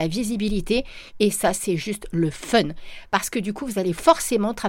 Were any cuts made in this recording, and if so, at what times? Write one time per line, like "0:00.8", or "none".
0:01.1